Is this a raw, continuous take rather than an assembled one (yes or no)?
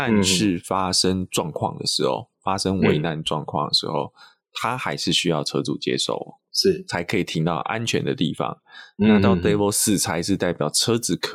yes